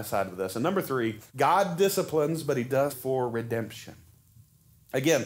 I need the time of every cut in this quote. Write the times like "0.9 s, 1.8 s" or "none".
1.3 s, 2.9 s